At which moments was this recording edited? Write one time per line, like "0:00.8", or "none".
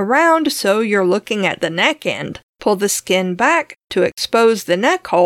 0:02.5